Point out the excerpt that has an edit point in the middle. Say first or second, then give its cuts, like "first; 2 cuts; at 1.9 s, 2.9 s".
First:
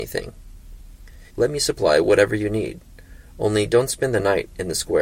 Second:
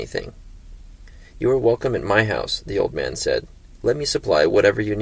first; 1 cut; at 1.3 s